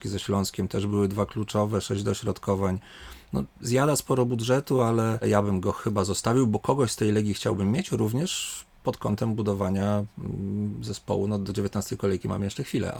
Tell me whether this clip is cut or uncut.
uncut